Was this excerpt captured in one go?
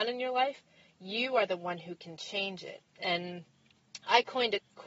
yes; 0 cuts

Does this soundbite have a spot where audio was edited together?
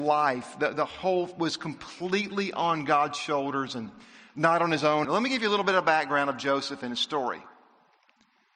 yes; 1 cut; at 5.0 s

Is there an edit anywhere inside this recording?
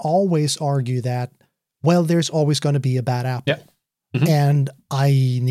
no; 0 cuts

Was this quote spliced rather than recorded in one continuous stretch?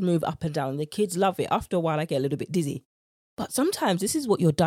no; 0 cuts

